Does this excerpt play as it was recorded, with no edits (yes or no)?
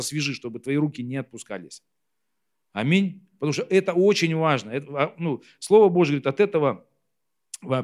yes